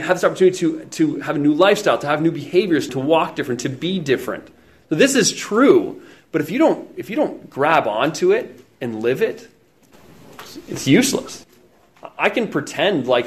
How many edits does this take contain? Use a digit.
2